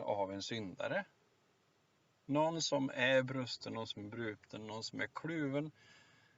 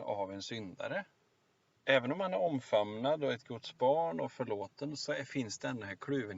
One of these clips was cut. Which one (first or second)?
second